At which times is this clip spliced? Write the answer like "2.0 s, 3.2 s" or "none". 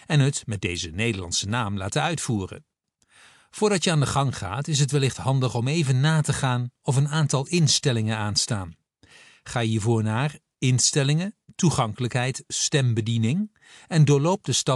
none